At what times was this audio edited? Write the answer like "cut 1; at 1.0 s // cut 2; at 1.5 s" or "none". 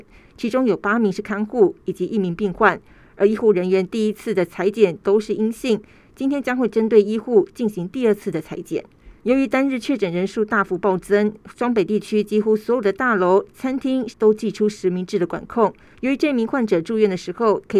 cut 1; at 9.2 s // cut 2; at 14.1 s // cut 3; at 15.9 s